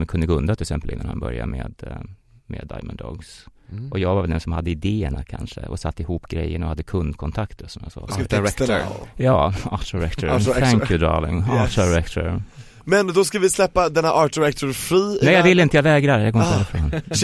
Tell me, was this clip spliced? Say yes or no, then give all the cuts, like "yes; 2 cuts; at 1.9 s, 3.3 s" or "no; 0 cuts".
no; 0 cuts